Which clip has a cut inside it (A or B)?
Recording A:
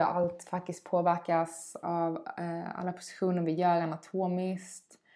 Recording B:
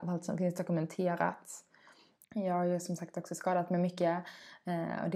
B